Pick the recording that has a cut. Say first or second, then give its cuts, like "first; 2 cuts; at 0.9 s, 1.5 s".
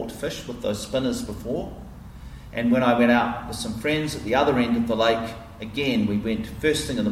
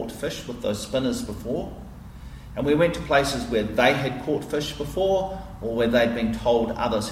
first; 1 cut; at 2.5 s